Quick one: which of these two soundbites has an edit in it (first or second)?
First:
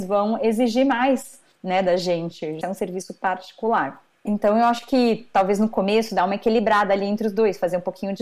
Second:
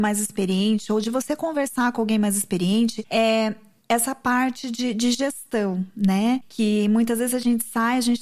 first